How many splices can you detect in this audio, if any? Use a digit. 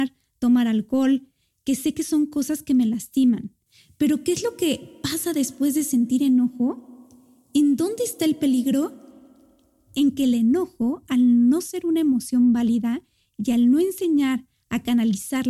0